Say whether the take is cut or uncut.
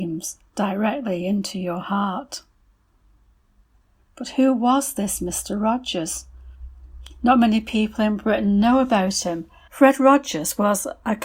cut